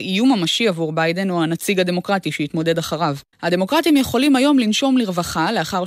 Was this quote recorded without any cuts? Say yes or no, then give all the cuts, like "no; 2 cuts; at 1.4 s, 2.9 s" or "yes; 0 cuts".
no; 1 cut; at 3.3 s